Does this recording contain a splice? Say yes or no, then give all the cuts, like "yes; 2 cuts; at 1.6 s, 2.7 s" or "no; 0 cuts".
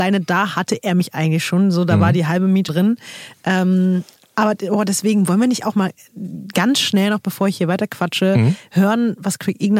yes; 1 cut; at 2.7 s